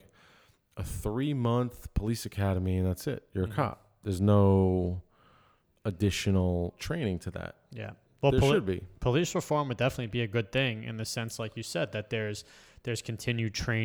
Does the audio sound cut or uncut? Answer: uncut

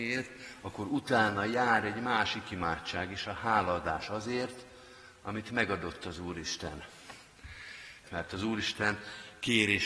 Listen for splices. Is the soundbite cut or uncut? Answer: cut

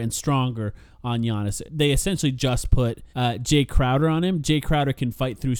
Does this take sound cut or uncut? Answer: cut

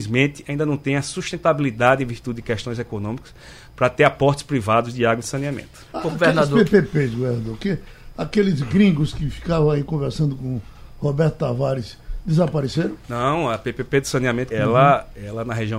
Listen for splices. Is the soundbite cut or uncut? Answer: cut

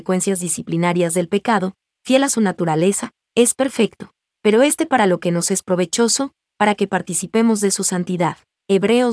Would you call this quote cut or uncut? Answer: uncut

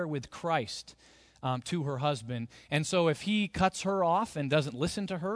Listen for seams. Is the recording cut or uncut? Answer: uncut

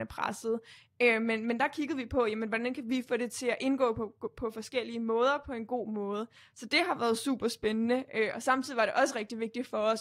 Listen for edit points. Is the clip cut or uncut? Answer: uncut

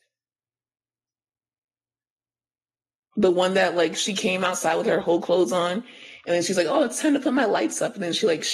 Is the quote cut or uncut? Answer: uncut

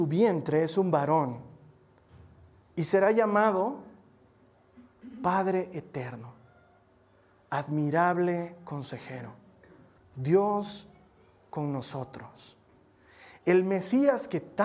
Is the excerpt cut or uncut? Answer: cut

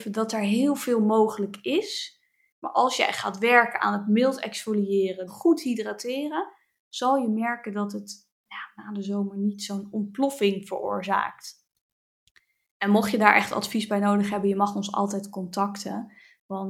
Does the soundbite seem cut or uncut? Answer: cut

